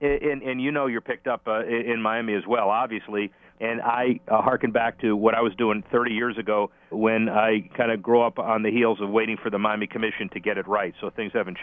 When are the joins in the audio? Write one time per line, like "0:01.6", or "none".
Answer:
0:03.5
0:06.9